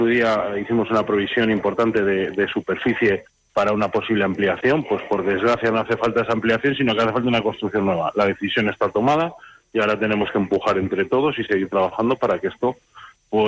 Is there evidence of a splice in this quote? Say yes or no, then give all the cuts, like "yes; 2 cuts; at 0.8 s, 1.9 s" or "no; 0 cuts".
no; 0 cuts